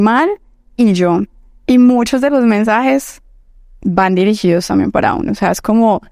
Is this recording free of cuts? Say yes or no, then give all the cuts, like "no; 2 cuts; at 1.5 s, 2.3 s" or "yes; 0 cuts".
yes; 0 cuts